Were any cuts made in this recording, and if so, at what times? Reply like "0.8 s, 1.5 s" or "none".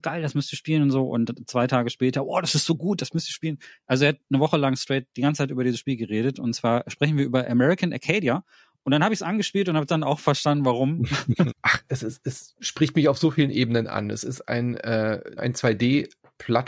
11.5 s, 15.4 s